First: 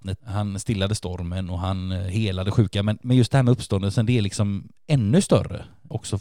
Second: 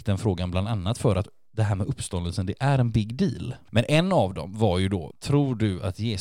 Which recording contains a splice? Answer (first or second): second